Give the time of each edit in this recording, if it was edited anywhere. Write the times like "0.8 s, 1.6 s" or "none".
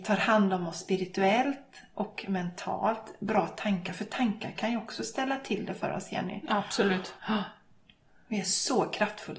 7.2 s